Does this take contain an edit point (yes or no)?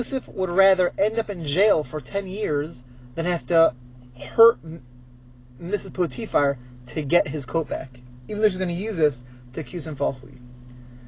no